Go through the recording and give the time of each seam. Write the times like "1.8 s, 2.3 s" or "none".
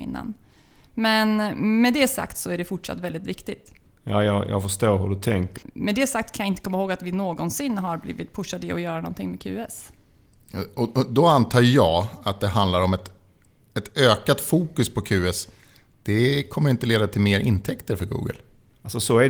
5.6 s